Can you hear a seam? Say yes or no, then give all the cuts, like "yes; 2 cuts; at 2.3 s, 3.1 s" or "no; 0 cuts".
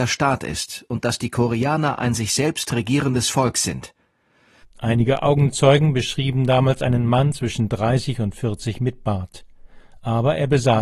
yes; 1 cut; at 4.6 s